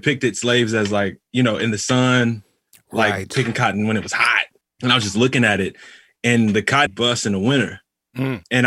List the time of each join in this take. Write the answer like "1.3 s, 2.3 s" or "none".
4.6 s, 6.9 s